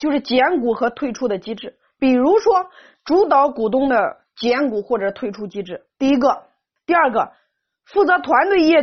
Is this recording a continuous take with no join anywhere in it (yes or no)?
no